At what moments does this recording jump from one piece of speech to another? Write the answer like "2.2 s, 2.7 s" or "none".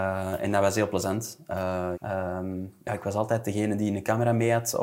1.9 s

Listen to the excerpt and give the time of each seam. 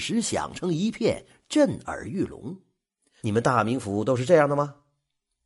3.2 s

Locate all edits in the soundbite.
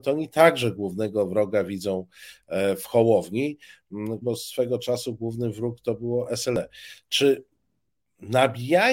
4.2 s

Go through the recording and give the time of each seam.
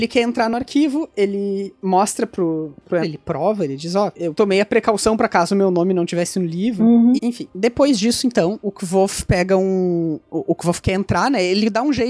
3.0 s, 7.2 s

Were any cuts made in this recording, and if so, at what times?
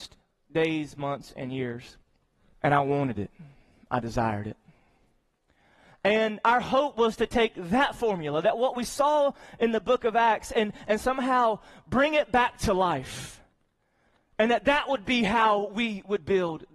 2.5 s

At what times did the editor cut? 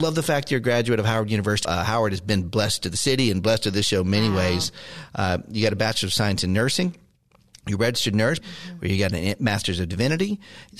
1.6 s, 8.4 s

